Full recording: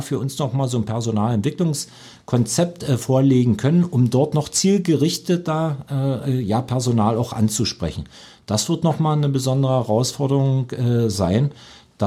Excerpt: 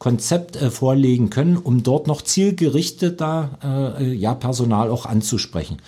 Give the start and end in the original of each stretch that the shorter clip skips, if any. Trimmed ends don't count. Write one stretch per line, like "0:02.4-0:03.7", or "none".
none